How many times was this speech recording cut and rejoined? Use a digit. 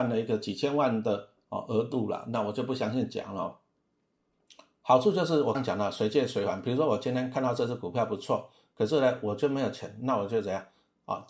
1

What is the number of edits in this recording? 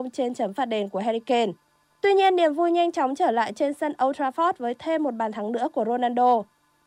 0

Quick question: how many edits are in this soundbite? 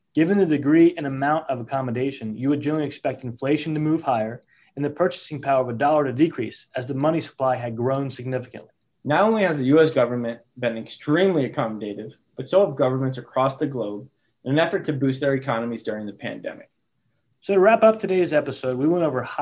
2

